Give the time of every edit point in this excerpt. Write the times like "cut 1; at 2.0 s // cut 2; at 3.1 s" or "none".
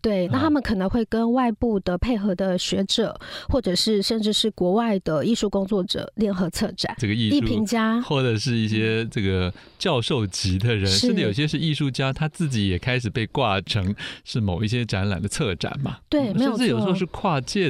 cut 1; at 7.0 s